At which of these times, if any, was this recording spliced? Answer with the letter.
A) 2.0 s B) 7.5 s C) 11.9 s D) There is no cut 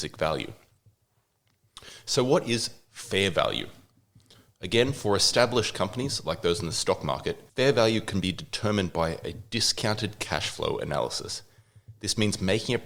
B